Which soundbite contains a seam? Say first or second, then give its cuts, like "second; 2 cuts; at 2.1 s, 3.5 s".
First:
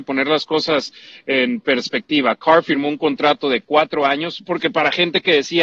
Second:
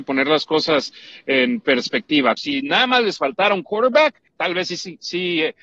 second; 2 cuts; at 2.4 s, 4.3 s